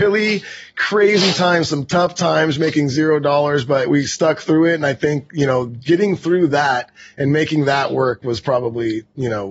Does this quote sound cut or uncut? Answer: uncut